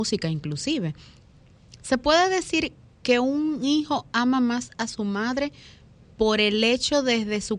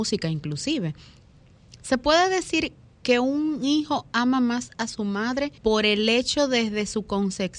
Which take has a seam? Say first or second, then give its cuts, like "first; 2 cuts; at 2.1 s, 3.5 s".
second; 1 cut; at 5.6 s